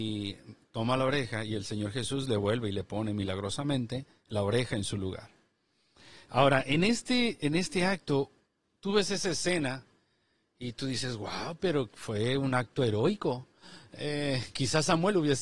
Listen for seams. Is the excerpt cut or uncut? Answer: uncut